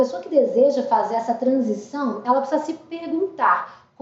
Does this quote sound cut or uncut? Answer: uncut